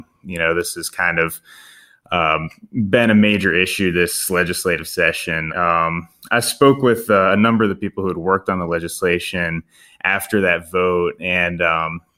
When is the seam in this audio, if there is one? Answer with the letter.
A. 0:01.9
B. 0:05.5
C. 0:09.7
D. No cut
B